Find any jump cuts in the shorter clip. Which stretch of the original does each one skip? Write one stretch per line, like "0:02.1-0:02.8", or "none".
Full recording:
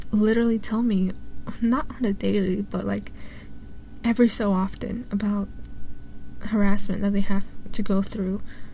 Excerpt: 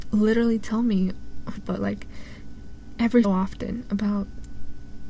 0:01.6-0:02.6
0:04.3-0:04.5

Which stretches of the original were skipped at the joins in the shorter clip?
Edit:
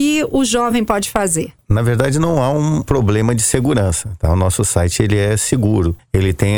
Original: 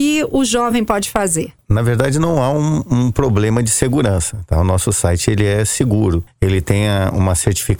0:02.8-0:03.1

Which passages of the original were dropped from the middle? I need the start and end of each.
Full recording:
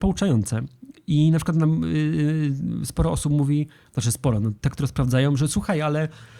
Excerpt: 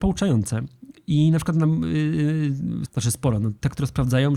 0:02.9-0:03.9

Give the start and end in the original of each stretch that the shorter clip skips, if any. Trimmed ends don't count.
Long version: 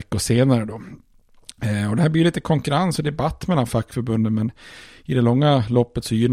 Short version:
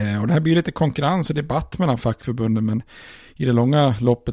none

